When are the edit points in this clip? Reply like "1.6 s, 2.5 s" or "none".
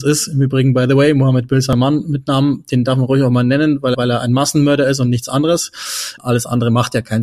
3.9 s, 6.2 s